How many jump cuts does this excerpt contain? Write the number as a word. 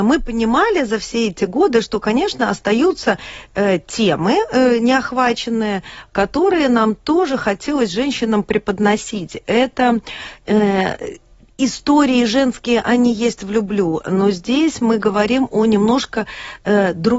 zero